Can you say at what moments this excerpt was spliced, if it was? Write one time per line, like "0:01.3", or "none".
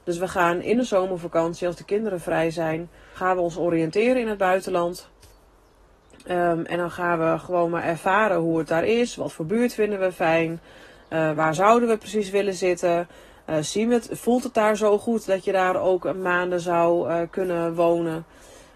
0:03.1
0:11.3